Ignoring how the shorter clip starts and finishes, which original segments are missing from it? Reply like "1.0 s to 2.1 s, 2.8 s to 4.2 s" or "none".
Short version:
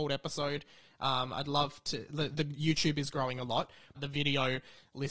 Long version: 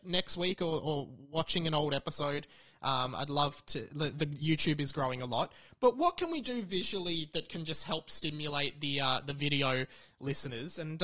5.8 s to 9.2 s